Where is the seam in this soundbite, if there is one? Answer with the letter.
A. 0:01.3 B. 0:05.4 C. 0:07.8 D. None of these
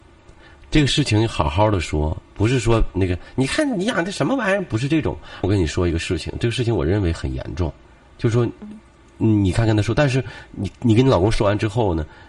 B